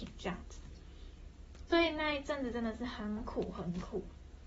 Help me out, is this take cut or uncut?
cut